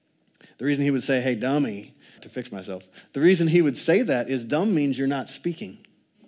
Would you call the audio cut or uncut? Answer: cut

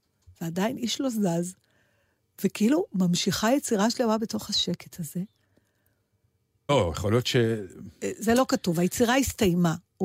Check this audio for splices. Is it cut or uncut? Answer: cut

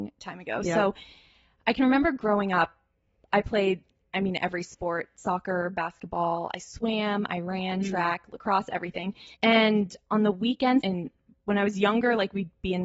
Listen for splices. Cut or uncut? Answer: cut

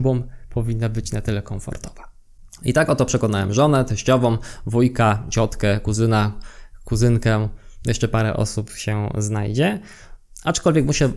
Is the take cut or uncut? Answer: uncut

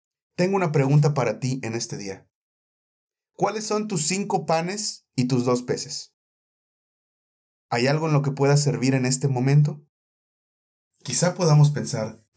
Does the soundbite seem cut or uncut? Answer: uncut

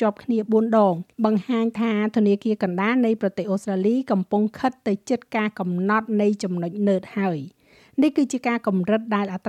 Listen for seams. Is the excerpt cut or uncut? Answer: cut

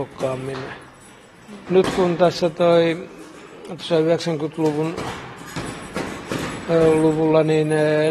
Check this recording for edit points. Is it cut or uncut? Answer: cut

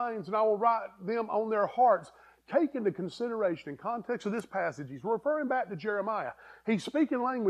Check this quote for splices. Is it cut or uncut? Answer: uncut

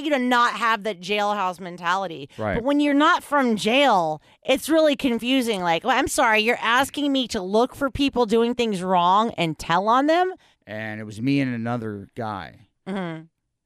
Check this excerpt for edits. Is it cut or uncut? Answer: cut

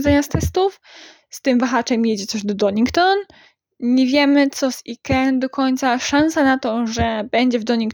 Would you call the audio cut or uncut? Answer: uncut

